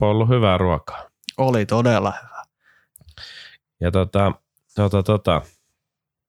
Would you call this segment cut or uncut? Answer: cut